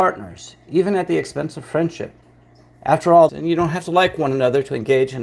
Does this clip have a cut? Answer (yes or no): yes